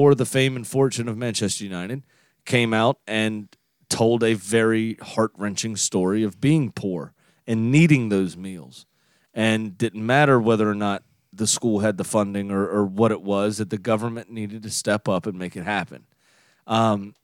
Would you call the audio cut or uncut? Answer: uncut